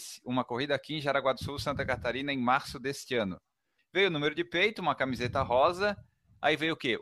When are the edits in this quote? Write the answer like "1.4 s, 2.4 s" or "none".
3.8 s